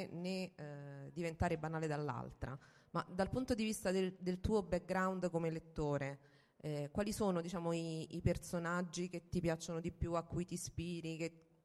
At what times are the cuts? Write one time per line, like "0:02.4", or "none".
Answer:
none